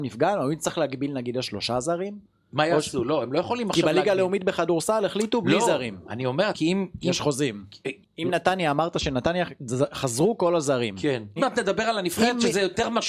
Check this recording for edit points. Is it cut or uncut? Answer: cut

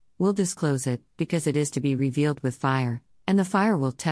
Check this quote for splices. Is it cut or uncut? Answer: uncut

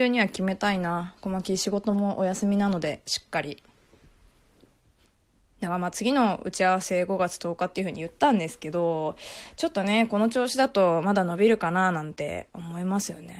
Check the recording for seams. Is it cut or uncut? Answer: uncut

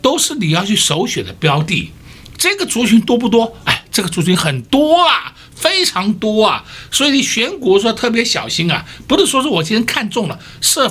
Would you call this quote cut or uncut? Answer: uncut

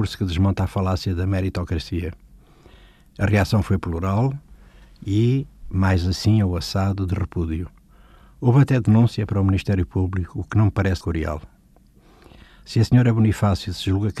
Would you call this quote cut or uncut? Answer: cut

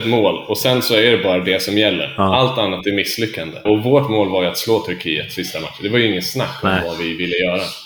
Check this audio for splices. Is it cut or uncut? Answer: cut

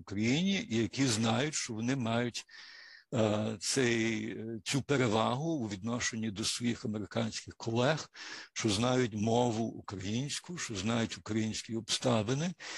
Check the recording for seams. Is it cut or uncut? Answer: uncut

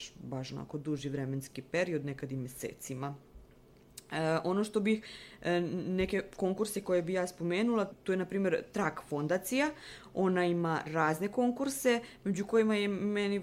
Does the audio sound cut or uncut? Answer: uncut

